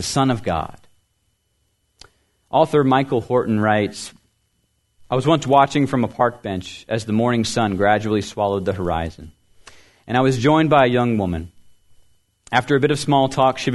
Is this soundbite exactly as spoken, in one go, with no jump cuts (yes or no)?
yes